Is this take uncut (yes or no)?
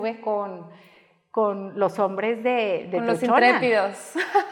yes